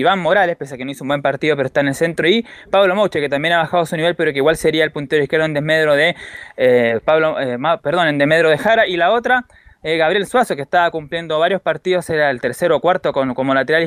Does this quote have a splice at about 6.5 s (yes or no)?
no